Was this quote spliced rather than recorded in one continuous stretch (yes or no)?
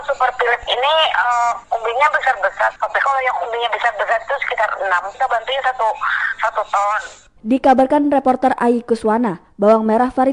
yes